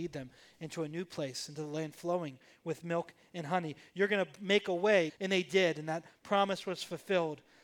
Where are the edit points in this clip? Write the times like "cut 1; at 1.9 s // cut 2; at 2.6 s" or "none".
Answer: cut 1; at 5.1 s